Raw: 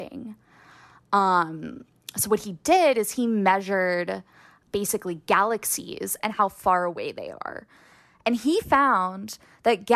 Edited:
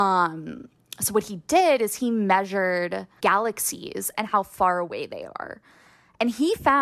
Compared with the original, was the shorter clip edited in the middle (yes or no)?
yes